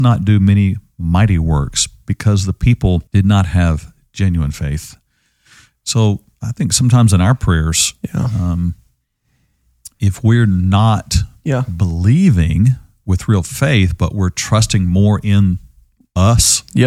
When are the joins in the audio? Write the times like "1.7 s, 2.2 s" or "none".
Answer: 3.1 s